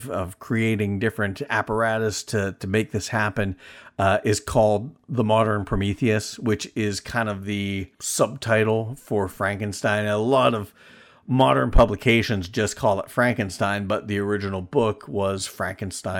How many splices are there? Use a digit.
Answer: 0